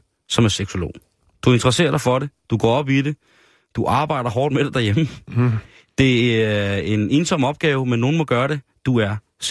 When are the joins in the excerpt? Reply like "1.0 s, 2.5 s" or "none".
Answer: none